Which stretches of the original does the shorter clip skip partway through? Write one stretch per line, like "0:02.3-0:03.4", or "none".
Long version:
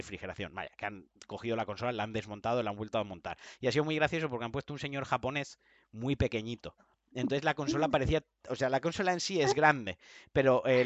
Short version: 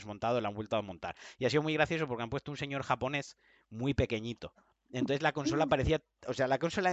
none